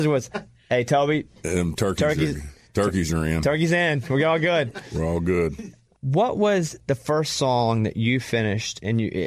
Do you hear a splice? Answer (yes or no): no